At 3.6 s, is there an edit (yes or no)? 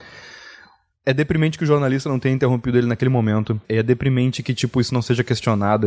yes